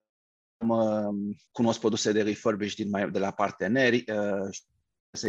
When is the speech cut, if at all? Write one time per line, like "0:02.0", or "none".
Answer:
0:01.5